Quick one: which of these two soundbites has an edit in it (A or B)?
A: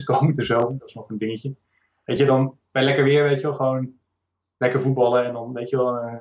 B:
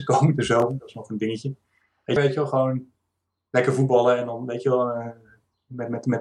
B